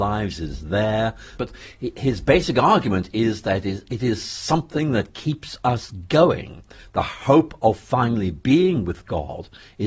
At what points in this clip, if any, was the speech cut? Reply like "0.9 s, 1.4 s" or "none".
1.4 s